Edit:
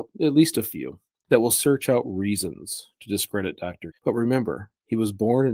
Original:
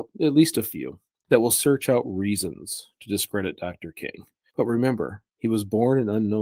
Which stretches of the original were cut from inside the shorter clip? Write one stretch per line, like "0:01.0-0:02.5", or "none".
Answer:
0:03.9-0:04.4